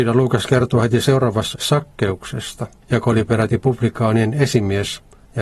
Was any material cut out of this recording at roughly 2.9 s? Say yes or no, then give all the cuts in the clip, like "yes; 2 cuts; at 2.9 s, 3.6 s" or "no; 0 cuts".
no; 1 cut; at 1.5 s